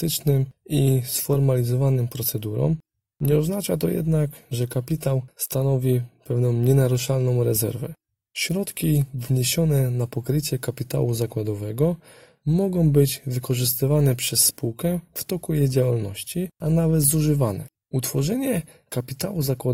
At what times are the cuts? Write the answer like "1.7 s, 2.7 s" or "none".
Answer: 17.8 s